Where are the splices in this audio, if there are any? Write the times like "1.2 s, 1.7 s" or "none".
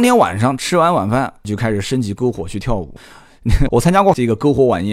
3.7 s